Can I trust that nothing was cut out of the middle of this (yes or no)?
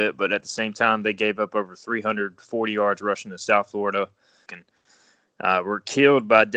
no